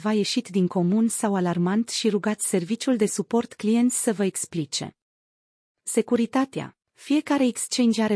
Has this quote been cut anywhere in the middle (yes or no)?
yes